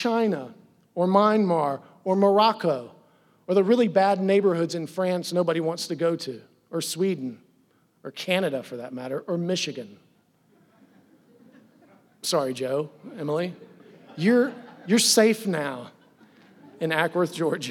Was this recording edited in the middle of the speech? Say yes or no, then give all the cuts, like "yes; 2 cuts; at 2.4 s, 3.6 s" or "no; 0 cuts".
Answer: no; 0 cuts